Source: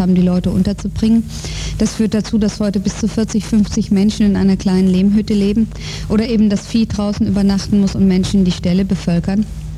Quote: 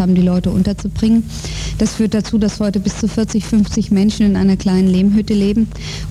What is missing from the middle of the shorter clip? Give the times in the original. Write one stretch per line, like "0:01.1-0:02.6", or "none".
none